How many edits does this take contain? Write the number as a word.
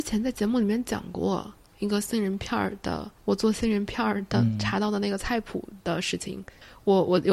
one